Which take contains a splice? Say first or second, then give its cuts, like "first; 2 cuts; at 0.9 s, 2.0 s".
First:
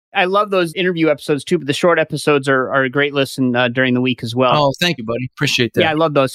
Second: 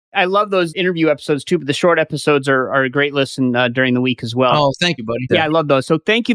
second; 1 cut; at 5.3 s